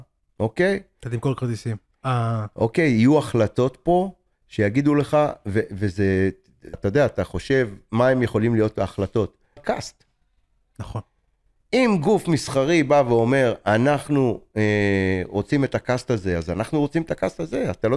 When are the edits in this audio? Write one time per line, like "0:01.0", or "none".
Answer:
0:01.9
0:06.7
0:09.6